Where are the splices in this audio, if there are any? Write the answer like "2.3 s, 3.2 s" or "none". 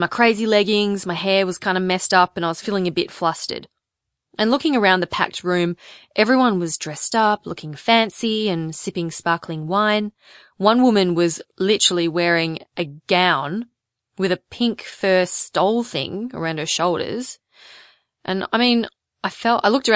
none